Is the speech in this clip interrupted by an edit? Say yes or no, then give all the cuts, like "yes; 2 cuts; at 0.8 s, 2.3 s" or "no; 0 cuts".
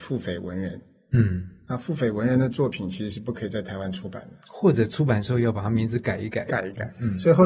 no; 0 cuts